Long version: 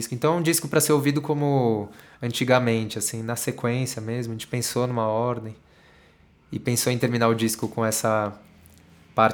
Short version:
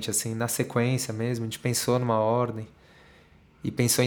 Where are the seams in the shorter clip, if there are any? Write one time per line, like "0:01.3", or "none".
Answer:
none

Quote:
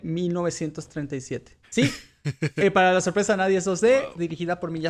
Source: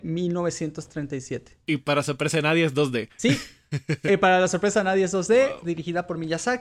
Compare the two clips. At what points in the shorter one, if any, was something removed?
0:01.6

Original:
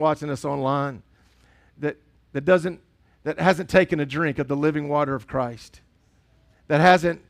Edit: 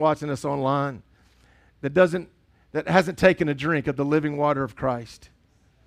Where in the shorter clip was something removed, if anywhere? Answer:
0:01.7

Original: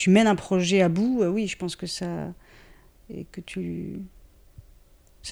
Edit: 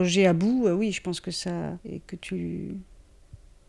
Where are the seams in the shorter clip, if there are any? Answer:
0:01.8

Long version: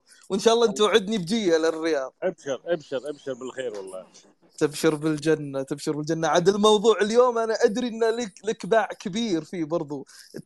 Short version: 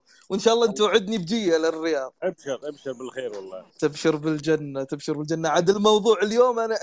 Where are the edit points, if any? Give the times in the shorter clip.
0:02.6
0:03.7

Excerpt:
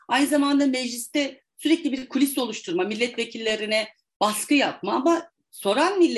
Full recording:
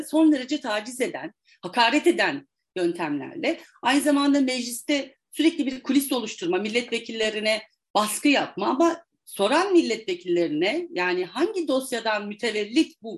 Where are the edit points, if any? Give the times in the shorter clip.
none

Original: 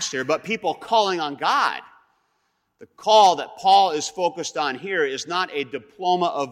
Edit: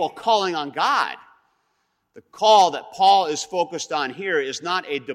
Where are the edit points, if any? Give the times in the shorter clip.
none

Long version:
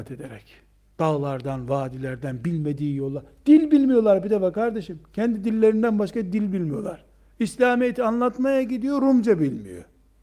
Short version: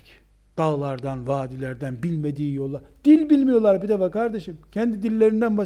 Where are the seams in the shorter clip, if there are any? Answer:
none

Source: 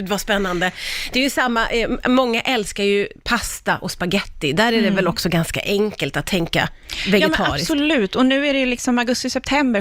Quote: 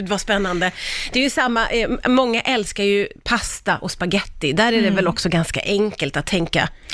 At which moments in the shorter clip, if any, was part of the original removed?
none

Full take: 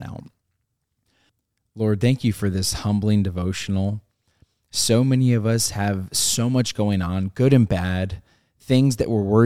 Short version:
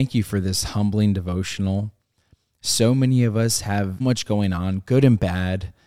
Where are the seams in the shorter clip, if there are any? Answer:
0:04.0

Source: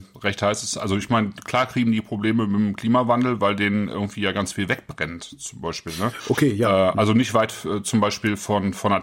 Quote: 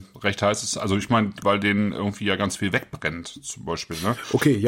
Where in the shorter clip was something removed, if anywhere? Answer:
0:01.4

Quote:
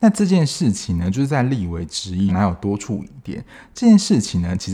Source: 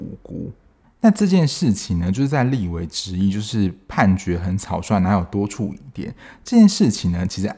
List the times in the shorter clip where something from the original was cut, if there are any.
0:02.3

